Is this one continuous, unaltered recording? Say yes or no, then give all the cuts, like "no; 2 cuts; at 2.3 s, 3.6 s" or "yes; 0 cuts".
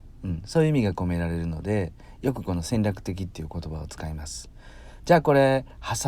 no; 1 cut; at 5.0 s